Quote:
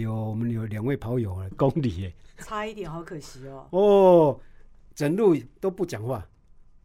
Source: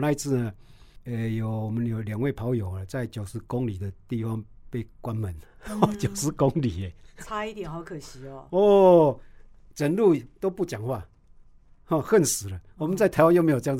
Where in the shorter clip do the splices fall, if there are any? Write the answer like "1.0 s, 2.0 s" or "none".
1.5 s